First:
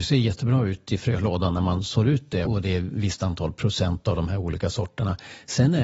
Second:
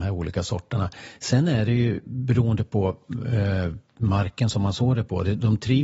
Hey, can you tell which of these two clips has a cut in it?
first; 1 cut; at 2.5 s

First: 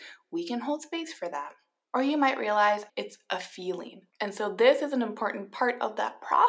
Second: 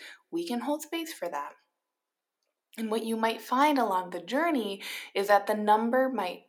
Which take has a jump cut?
first; 3 cuts; at 1.8 s, 2.9 s, 4.1 s

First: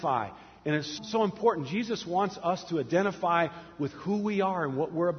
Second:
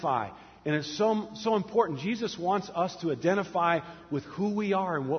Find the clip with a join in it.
first; 1 cut; at 1.0 s

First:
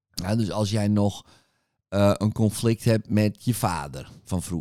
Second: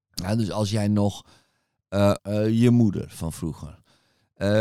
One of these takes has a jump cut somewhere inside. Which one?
second; 1 cut; at 2.2 s

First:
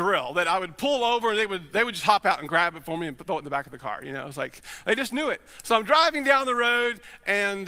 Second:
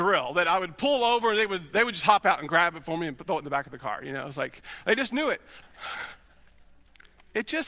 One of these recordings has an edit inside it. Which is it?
second; 1 cut; at 5.6 s

